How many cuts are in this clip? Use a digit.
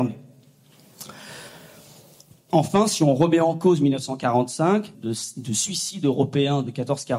1